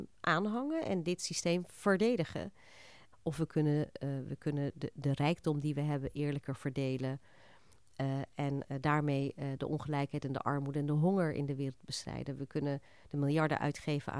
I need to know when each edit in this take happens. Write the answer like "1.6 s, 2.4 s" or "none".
3.1 s